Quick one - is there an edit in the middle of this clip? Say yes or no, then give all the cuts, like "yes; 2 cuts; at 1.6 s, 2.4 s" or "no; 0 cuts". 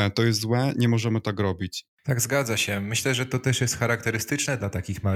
no; 0 cuts